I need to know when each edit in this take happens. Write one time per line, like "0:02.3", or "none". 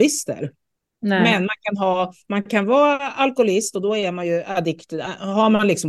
none